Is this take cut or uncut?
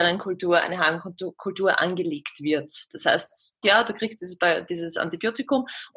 cut